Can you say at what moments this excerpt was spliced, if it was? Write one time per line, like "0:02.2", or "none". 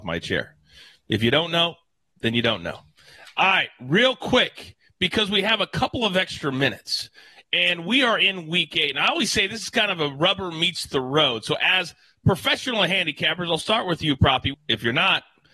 0:14.5